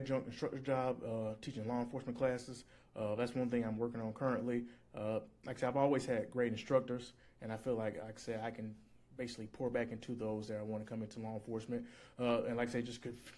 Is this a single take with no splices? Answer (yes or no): yes